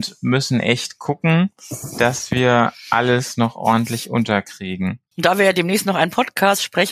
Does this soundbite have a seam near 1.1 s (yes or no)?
no